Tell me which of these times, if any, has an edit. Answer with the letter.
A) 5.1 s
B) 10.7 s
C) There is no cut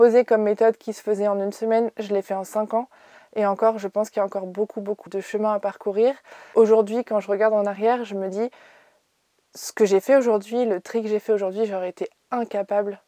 A